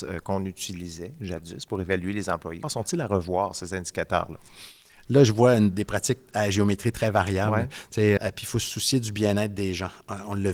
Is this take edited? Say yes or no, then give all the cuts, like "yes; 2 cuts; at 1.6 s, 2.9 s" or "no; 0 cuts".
yes; 2 cuts; at 2.6 s, 8.2 s